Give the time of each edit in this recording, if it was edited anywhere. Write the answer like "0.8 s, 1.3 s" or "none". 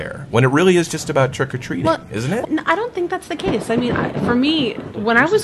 2.4 s